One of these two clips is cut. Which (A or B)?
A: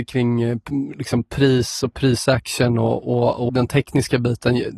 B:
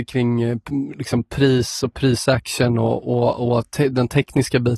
A